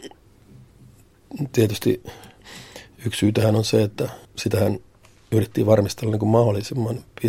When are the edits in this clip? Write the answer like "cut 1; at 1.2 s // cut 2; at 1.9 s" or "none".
cut 1; at 4.3 s